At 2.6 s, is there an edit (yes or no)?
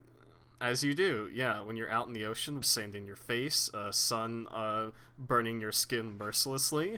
yes